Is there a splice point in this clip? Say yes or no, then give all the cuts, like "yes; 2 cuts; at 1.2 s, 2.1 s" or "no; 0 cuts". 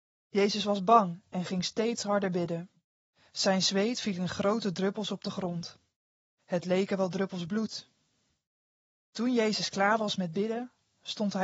no; 0 cuts